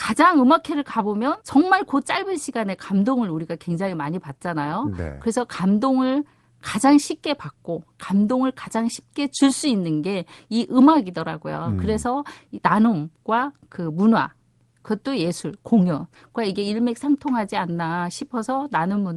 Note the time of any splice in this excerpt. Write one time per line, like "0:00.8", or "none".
0:01.4